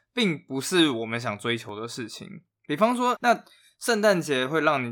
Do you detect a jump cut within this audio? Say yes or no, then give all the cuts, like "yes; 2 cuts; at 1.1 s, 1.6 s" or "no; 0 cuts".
yes; 1 cut; at 3.2 s